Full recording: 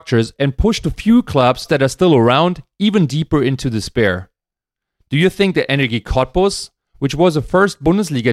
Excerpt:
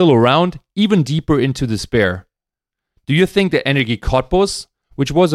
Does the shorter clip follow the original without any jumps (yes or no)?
yes